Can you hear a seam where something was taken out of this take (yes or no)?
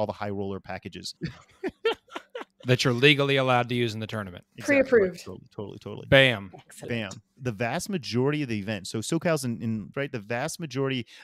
yes